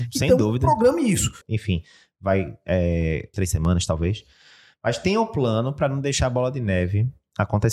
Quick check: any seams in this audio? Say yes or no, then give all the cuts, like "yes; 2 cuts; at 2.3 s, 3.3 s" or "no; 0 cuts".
yes; 2 cuts; at 1.4 s, 3.3 s